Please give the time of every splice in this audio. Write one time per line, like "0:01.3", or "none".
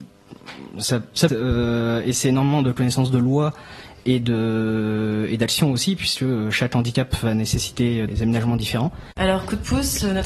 0:01.3
0:08.1